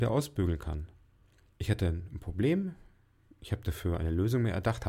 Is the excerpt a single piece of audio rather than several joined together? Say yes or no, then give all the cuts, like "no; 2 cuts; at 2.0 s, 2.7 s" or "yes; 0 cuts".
no; 1 cut; at 1.5 s